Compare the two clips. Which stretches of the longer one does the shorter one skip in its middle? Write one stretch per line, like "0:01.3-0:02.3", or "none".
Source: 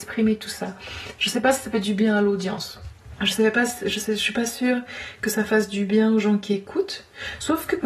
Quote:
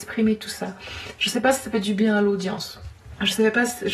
none